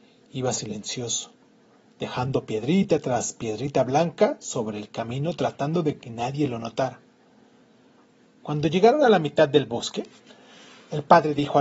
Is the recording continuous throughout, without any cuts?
yes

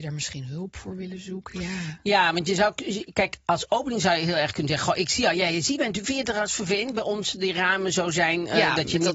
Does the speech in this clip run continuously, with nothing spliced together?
yes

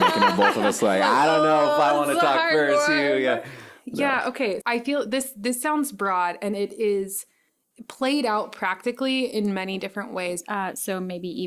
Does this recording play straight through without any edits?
no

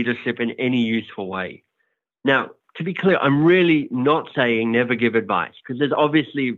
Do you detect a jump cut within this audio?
no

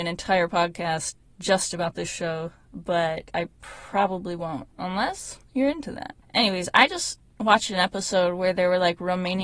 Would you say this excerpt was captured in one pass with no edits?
yes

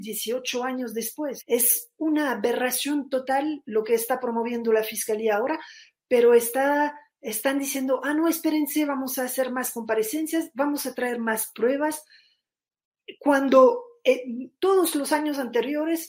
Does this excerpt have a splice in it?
yes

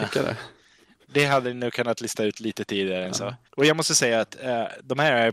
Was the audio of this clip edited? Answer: yes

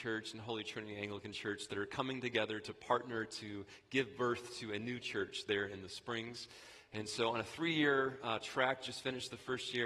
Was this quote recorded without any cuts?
yes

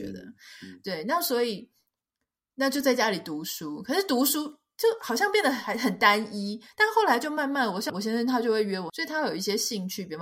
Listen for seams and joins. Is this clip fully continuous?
no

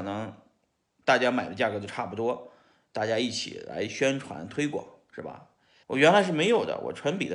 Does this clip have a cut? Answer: yes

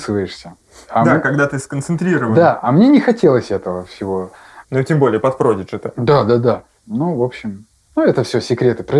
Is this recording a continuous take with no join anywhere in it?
no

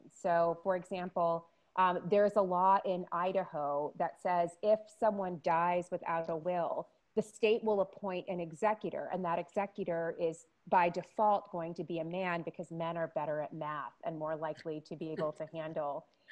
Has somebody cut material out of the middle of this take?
no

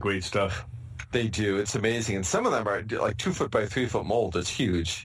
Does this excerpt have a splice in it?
no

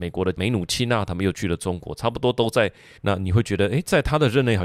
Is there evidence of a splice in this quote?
yes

